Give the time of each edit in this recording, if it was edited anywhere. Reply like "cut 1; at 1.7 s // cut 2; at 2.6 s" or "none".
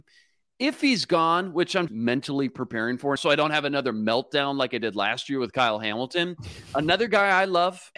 cut 1; at 1.9 s // cut 2; at 3.2 s